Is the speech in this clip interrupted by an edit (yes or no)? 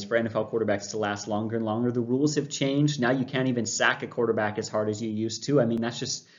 no